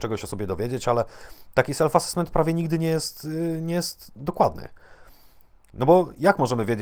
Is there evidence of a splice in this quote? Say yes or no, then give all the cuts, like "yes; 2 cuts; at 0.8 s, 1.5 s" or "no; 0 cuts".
no; 0 cuts